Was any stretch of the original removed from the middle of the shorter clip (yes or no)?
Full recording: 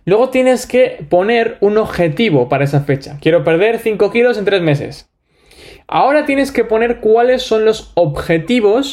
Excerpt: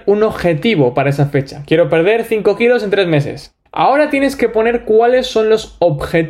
yes